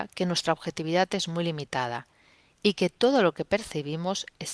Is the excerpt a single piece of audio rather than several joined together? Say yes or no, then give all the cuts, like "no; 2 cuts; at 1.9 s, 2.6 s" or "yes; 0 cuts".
yes; 0 cuts